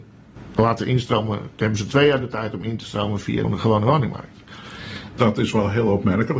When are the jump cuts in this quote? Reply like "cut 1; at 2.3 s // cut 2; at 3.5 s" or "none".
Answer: cut 1; at 3.4 s // cut 2; at 5.2 s